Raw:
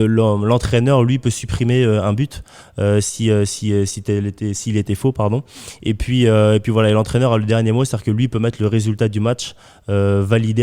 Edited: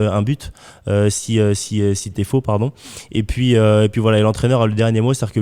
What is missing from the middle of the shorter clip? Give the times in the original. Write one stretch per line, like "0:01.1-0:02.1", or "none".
0:04.0-0:04.8

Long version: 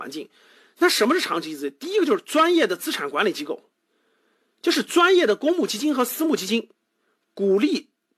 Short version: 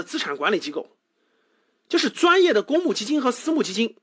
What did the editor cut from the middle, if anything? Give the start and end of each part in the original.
none

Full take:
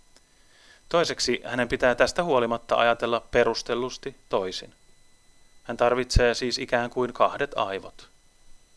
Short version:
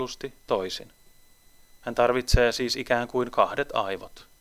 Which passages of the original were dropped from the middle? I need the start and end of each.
none

